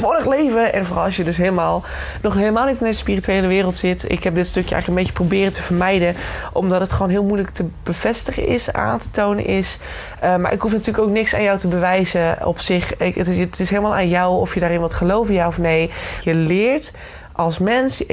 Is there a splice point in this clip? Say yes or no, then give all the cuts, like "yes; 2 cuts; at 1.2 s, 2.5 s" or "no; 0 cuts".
yes; 1 cut; at 16.2 s